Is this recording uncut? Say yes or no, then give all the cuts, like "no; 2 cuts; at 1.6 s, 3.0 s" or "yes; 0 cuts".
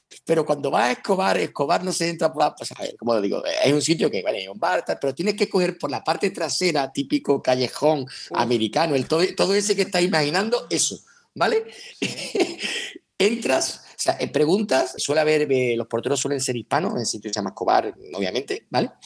no; 1 cut; at 15.0 s